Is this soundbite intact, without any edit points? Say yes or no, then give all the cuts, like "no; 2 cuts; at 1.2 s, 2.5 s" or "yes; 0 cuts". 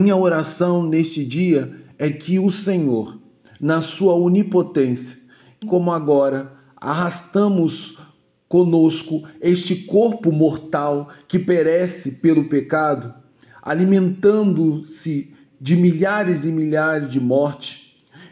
no; 2 cuts; at 3.5 s, 5.6 s